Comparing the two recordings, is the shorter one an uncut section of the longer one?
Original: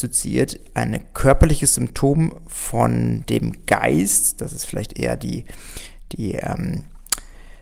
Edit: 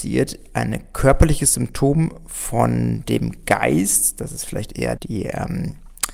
no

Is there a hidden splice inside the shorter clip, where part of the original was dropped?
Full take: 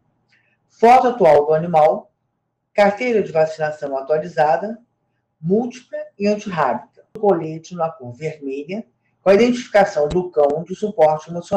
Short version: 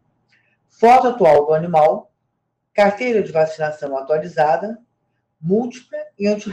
no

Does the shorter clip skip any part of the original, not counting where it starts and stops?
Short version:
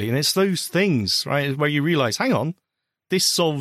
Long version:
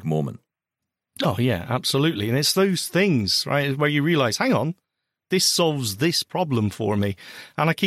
no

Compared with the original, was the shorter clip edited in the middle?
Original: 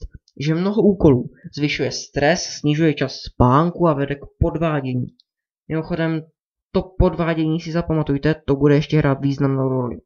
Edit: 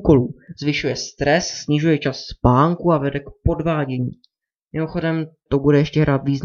yes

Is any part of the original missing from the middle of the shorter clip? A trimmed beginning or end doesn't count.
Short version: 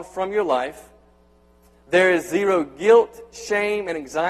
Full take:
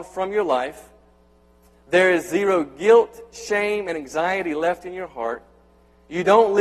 no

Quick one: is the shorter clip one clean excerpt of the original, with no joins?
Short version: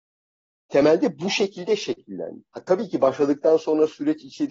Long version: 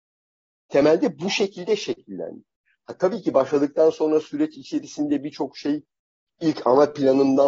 no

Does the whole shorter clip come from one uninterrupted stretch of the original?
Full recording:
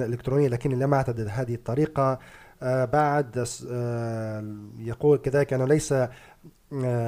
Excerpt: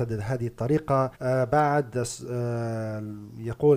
no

